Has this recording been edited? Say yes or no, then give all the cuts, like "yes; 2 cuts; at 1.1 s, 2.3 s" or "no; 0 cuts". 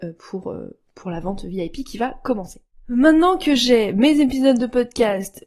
no; 0 cuts